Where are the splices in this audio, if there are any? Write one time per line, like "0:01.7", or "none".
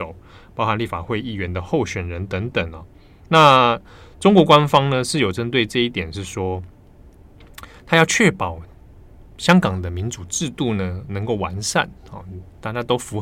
none